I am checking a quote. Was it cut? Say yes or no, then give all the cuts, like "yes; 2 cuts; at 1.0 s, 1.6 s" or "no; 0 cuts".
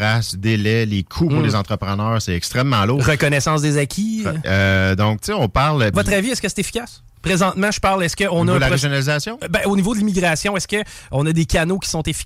yes; 2 cuts; at 4.4 s, 5.9 s